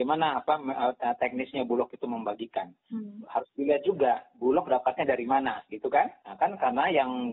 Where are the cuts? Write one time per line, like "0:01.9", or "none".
none